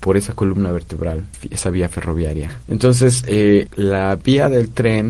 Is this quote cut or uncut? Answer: cut